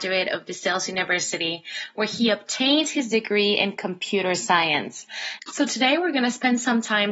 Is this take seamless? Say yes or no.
no